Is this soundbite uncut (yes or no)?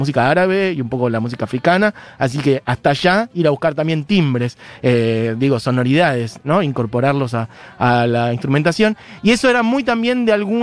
yes